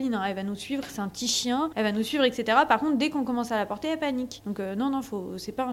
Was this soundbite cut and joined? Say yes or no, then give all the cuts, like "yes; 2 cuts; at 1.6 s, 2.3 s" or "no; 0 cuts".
no; 0 cuts